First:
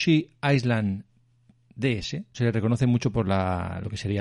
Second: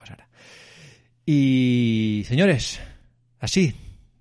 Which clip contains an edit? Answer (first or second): first